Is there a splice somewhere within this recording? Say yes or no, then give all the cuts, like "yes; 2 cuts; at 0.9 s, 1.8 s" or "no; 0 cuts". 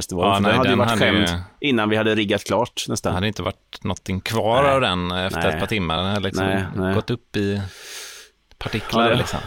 no; 0 cuts